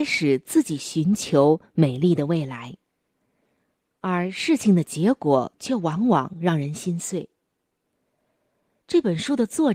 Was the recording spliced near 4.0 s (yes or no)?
no